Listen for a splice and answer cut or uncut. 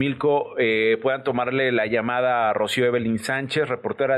uncut